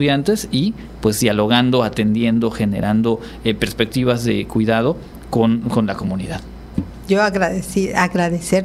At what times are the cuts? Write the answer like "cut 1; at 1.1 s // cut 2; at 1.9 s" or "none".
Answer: cut 1; at 6.7 s